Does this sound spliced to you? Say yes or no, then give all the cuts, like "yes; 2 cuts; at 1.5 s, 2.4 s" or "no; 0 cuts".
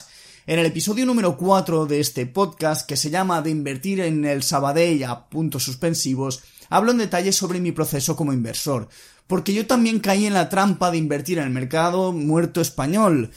no; 0 cuts